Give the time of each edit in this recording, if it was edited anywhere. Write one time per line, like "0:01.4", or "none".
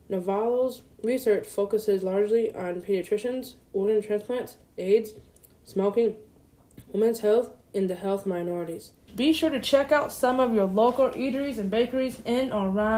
0:06.9
0:09.1